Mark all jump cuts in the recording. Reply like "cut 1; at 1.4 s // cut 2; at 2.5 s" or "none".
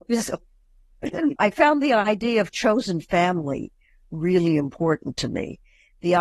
cut 1; at 1.4 s